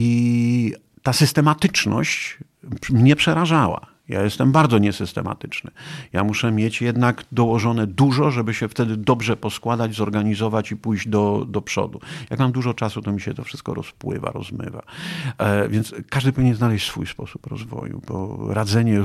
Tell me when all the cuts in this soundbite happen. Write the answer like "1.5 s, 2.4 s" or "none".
none